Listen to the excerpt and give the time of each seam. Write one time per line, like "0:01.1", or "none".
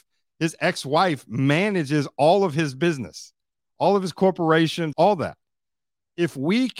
0:04.9